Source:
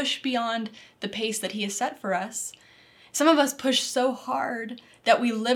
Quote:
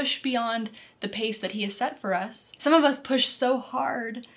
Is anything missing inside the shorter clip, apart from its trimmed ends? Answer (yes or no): yes